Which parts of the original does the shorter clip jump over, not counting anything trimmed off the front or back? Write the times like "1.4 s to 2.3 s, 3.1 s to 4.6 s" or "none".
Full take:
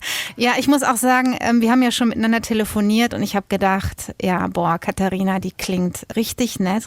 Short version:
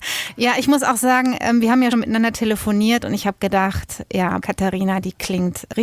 1.9 s to 2.0 s, 4.5 s to 4.8 s